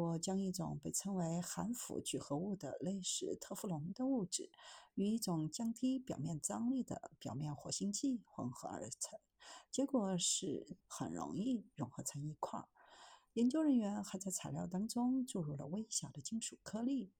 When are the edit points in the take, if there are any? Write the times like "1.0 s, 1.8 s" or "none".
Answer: 10.8 s